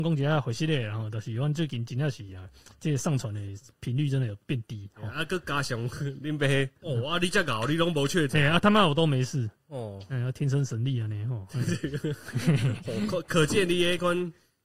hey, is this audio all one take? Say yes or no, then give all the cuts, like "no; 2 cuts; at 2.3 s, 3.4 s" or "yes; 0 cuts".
no; 1 cut; at 6.8 s